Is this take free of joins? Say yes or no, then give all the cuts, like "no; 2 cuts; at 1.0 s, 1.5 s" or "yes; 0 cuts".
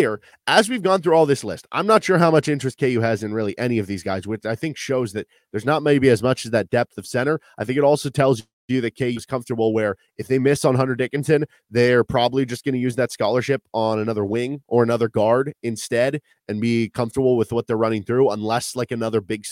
yes; 0 cuts